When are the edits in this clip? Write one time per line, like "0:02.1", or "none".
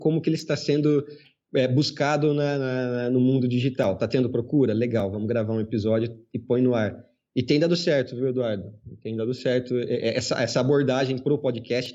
none